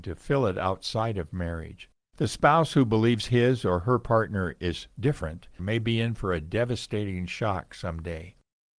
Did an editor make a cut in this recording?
yes; 2 cuts; at 2.1 s, 5.6 s

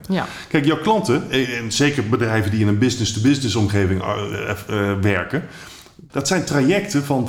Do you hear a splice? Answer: yes; 1 cut; at 6.1 s

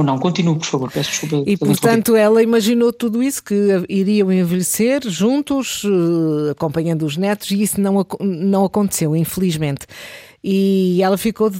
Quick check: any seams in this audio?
no; 0 cuts

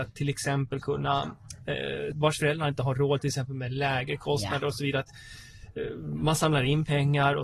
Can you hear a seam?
yes; 1 cut; at 2.1 s

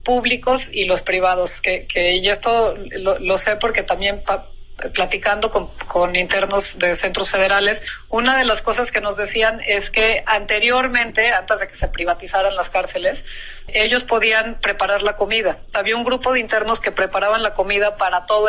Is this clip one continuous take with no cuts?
no; 2 cuts; at 13.7 s, 15.7 s

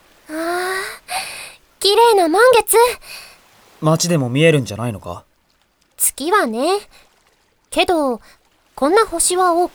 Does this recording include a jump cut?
no; 0 cuts

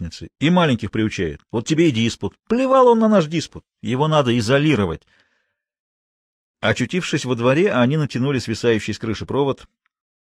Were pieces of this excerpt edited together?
no; 0 cuts

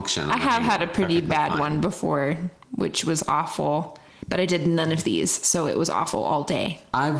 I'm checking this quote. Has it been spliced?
no; 0 cuts

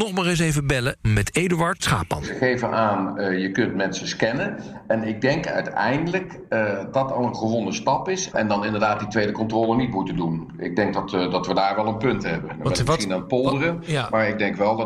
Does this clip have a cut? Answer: yes; 2 cuts; at 6.9 s, 8.3 s

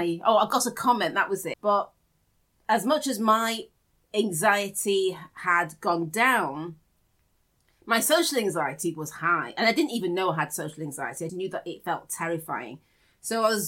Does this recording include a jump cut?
yes; 2 cuts; at 1.5 s, 11.3 s

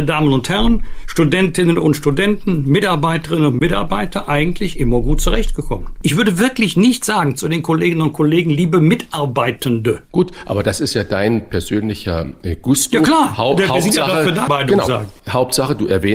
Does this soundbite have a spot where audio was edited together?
yes; 1 cut; at 14.5 s

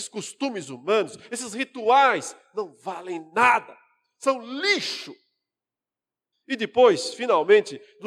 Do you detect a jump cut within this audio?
yes; 1 cut; at 6.3 s

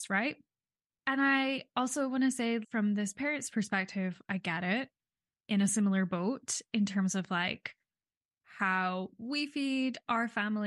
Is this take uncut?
no; 2 cuts; at 0.9 s, 2.6 s

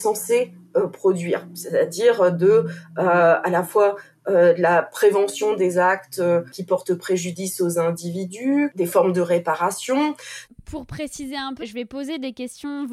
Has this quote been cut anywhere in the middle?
yes; 2 cuts; at 10.4 s, 11.6 s

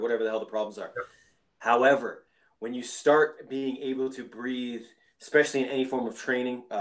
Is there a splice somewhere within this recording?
no; 0 cuts

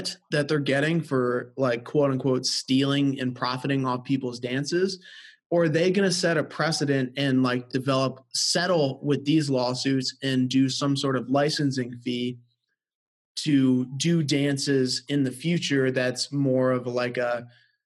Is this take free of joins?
yes; 0 cuts

